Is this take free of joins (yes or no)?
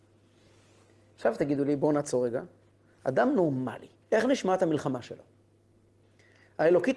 no